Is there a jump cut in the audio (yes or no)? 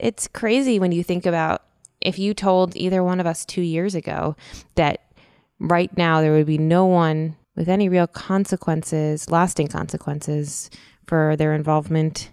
yes